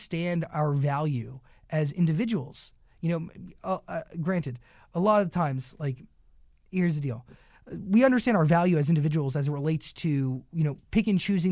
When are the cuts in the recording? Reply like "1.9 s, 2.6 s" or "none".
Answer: none